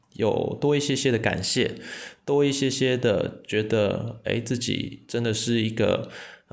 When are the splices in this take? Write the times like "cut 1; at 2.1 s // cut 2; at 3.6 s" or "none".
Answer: none